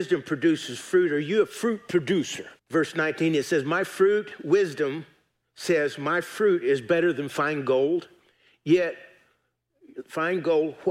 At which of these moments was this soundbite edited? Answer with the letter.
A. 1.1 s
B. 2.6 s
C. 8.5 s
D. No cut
B